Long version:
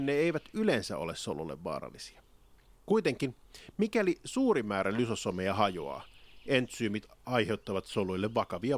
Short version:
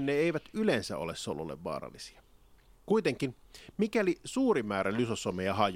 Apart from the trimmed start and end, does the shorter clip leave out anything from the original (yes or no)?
no